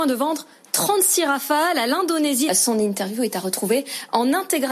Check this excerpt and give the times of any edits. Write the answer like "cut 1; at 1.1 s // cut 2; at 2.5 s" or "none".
cut 1; at 2.5 s